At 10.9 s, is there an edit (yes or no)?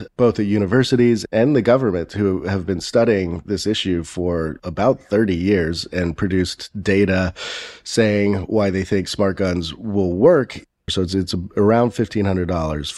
yes